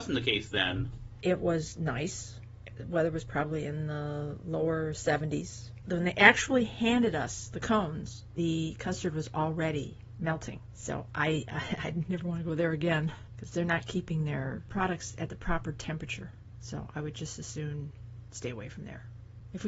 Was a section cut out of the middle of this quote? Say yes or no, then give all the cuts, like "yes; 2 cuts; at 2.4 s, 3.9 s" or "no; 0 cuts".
yes; 1 cut; at 1.2 s